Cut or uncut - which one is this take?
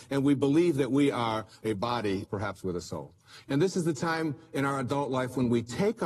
cut